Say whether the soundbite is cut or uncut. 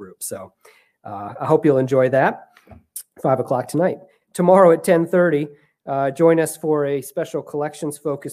cut